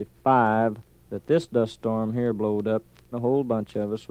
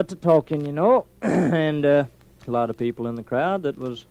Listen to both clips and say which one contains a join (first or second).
first